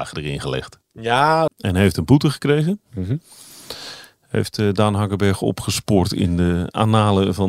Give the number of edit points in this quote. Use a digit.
1